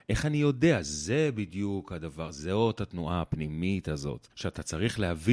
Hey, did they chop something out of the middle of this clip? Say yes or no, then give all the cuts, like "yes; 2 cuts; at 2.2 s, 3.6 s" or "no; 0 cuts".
yes; 1 cut; at 4.3 s